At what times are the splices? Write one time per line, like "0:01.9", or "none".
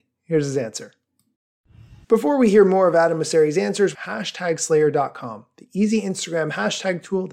0:02.0
0:03.9